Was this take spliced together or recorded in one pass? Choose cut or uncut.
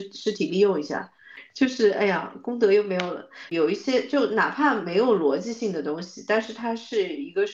cut